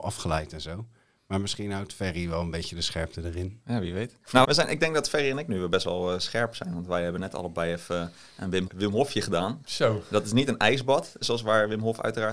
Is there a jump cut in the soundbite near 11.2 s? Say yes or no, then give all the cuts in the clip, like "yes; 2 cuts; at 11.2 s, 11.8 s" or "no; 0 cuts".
yes; 3 cuts; at 4.4 s, 8.7 s, 11.2 s